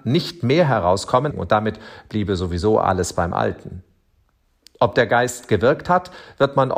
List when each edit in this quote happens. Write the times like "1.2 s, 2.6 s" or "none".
1.3 s